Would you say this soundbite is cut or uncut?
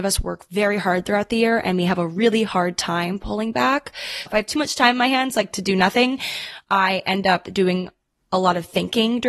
cut